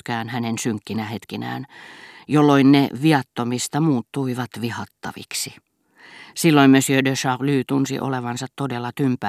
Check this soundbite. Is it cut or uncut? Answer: uncut